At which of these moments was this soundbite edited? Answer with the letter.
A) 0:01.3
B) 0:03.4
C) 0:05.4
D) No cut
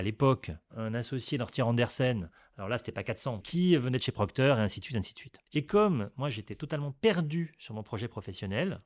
B